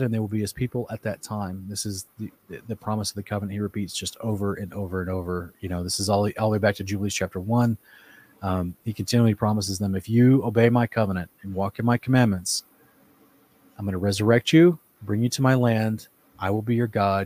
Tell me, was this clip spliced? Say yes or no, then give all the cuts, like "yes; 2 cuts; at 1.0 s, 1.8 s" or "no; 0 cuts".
no; 0 cuts